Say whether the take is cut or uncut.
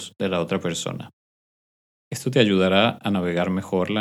uncut